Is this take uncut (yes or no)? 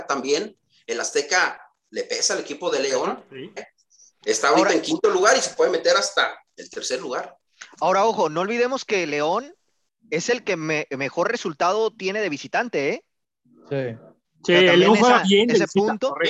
no